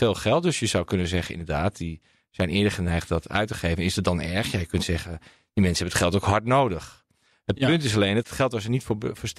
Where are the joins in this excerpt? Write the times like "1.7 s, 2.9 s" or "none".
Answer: none